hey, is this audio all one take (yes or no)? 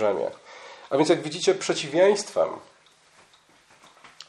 yes